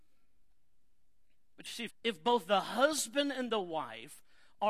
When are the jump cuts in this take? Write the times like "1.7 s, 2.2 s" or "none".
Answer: 1.9 s

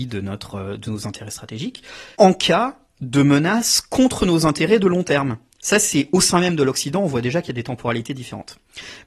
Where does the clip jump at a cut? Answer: 2.1 s, 5.6 s

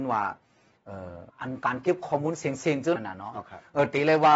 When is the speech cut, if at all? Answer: 1.3 s, 3.0 s

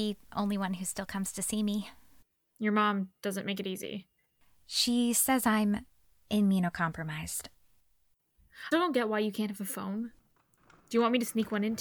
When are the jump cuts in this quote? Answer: 8.7 s

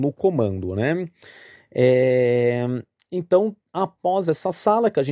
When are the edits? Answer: none

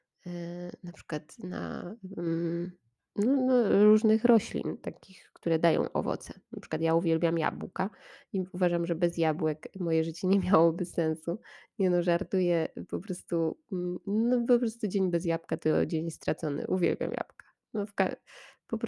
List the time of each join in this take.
none

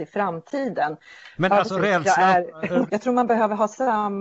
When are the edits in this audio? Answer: 1.3 s, 2.9 s

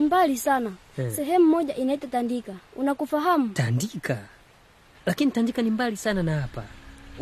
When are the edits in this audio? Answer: 4.9 s

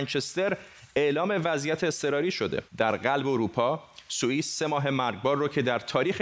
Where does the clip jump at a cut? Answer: 2.7 s

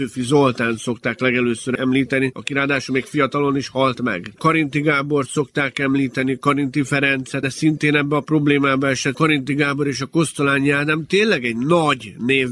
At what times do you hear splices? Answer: 4.4 s, 7.4 s

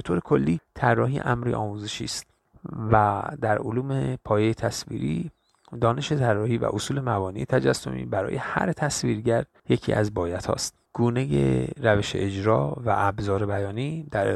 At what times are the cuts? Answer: 10.9 s

